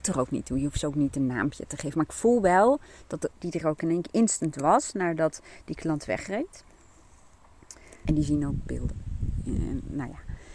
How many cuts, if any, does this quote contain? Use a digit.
2